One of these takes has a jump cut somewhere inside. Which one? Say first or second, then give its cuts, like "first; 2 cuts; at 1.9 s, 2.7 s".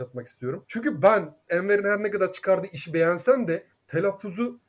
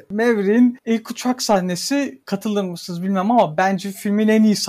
first; 1 cut; at 3.8 s